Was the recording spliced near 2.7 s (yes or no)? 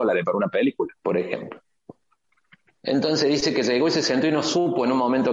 no